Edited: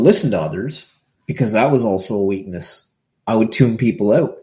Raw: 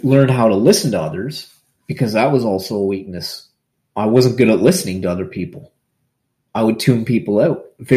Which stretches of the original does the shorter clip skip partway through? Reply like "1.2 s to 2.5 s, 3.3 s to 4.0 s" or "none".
3.8 s to 6.5 s